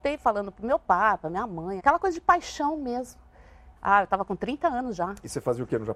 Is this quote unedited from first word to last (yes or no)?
no